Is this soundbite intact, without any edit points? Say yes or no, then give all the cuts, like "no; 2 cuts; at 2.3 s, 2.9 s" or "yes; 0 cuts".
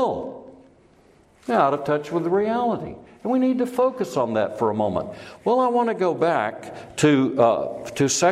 yes; 0 cuts